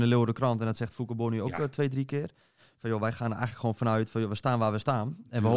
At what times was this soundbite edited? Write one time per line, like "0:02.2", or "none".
none